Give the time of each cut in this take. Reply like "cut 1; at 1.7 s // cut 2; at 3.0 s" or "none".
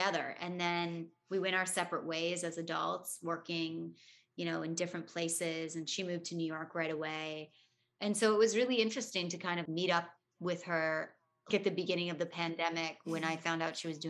cut 1; at 9.7 s // cut 2; at 11.5 s